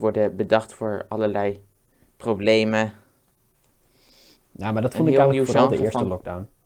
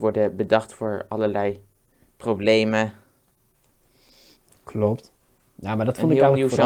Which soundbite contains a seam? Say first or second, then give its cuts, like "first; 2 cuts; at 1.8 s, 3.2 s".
first; 1 cut; at 4.5 s